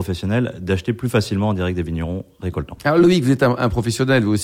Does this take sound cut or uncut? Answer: uncut